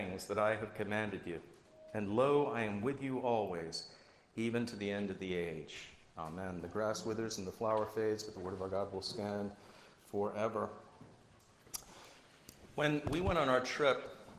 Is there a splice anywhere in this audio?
no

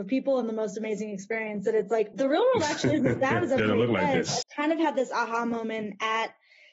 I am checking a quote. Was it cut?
yes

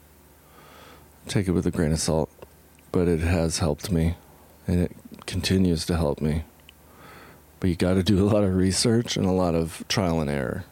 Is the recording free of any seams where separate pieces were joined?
yes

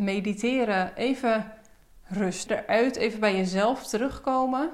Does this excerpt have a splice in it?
yes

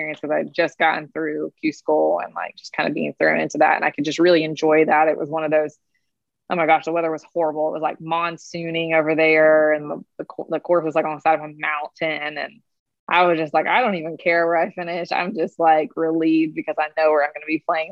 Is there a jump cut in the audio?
no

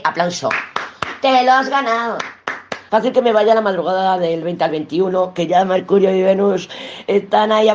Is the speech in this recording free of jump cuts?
no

